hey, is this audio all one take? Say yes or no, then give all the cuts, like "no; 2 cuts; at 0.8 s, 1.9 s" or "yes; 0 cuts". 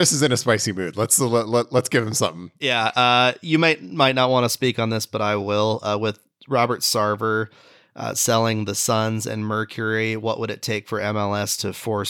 yes; 0 cuts